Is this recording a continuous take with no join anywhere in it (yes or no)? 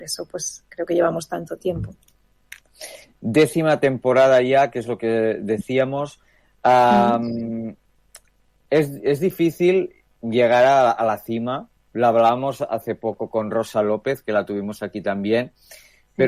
yes